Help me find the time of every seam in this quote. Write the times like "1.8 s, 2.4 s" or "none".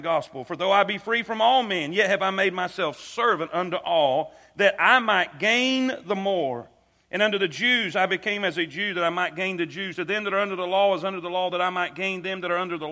none